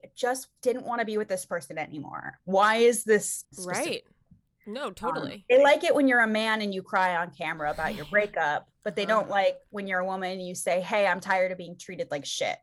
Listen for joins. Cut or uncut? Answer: cut